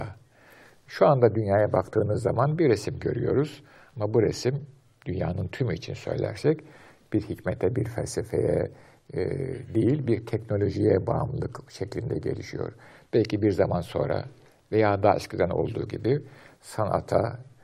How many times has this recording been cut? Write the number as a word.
zero